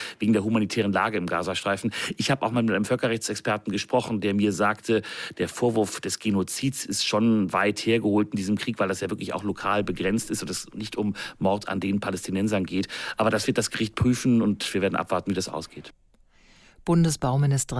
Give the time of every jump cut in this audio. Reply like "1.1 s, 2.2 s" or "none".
none